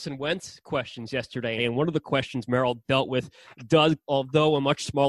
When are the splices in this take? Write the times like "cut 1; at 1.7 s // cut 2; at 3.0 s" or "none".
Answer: cut 1; at 1.6 s // cut 2; at 4.1 s